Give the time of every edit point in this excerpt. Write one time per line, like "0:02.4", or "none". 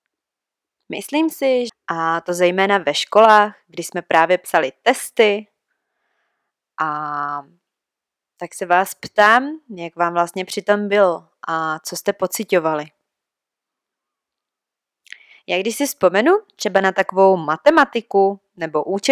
0:01.7